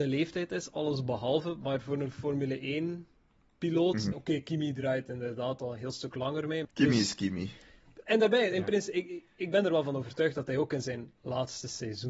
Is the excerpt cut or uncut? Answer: cut